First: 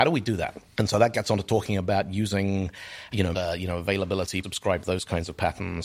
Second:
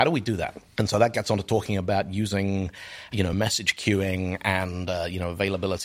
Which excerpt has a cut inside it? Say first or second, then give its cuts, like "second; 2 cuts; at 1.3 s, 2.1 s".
first; 2 cuts; at 3.3 s, 4.4 s